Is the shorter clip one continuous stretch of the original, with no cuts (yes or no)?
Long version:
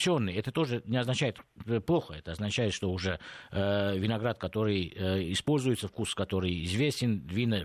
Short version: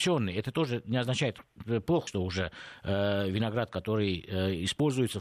no